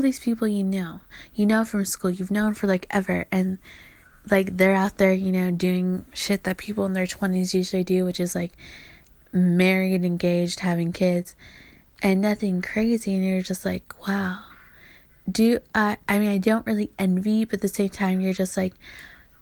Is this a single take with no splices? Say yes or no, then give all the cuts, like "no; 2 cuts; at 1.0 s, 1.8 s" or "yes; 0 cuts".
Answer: yes; 0 cuts